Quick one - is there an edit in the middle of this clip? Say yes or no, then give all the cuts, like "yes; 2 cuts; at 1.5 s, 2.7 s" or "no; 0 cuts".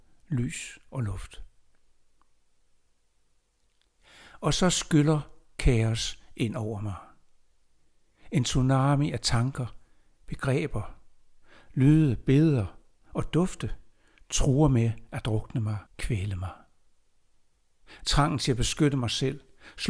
yes; 1 cut; at 15.9 s